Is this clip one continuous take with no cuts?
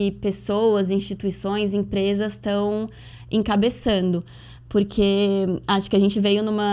yes; 0 cuts

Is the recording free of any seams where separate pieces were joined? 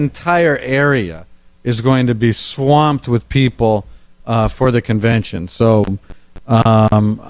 yes; 0 cuts

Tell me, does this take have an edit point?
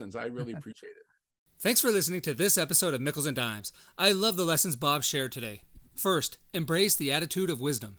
no; 0 cuts

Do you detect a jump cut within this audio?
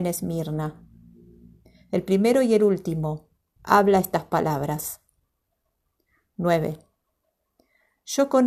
yes; 1 cut; at 3.6 s

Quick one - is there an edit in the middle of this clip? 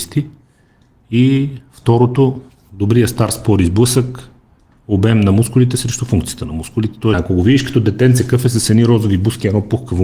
yes; 1 cut; at 7.1 s

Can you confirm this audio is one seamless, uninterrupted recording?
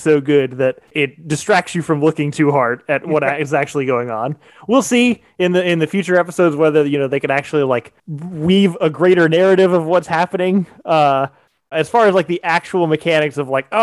no; 1 cut; at 11.7 s

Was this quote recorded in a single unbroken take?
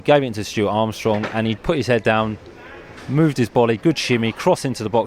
no; 2 cuts; at 1.6 s, 3.8 s

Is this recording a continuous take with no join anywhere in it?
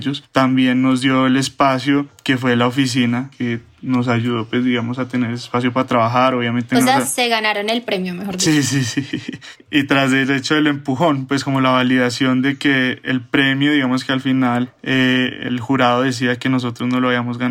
yes; 0 cuts

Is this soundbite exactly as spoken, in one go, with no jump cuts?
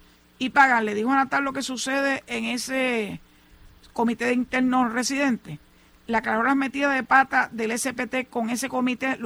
yes; 0 cuts

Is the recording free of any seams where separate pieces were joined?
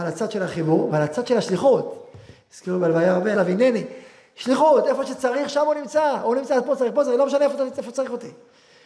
no; 1 cut; at 3.3 s

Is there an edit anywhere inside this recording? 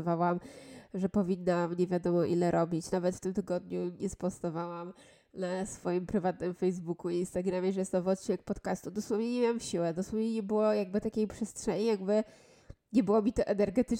no; 0 cuts

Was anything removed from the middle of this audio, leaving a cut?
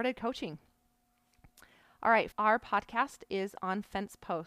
yes; 1 cut; at 2.3 s

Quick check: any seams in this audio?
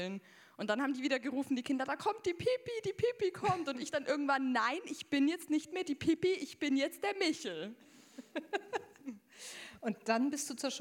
no; 0 cuts

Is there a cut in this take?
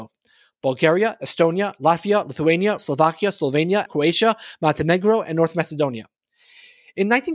yes; 2 cuts; at 2.8 s, 3.9 s

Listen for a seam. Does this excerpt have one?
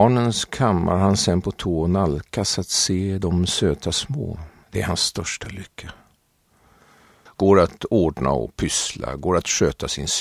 yes; 2 cuts; at 4.6 s, 7.3 s

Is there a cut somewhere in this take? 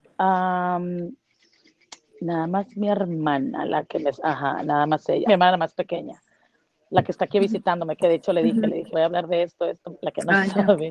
yes; 3 cuts; at 5.3 s, 8.9 s, 10.0 s

